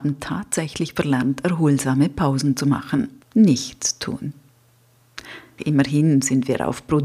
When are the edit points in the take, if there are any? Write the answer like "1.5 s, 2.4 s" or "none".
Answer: 3.2 s, 5.6 s

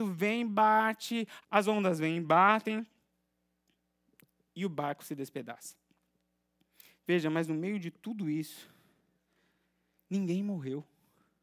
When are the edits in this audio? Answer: 1.4 s

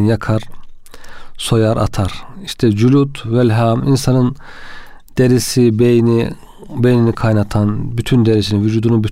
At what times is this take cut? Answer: none

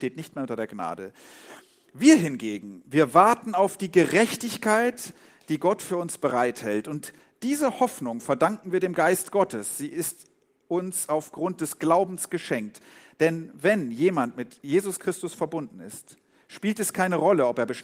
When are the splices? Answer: none

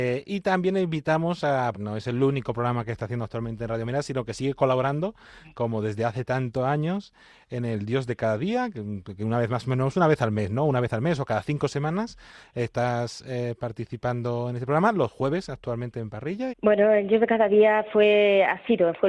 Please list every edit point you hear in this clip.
1.7 s, 16.5 s

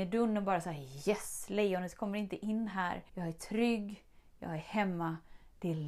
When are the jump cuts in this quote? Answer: 3.1 s

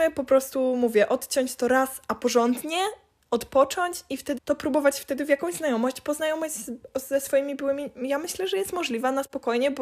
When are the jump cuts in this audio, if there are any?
4.4 s

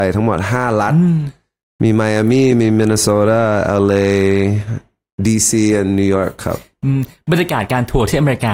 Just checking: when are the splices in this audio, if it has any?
none

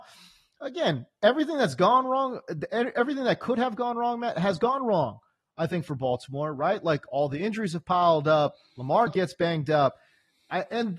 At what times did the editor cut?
9.1 s

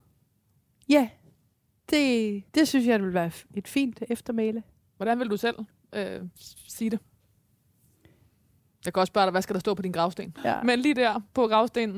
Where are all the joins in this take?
2.5 s, 10.4 s

